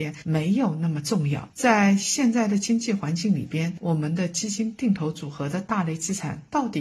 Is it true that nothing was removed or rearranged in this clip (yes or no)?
yes